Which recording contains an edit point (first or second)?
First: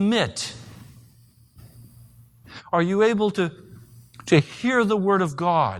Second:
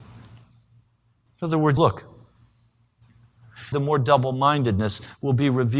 second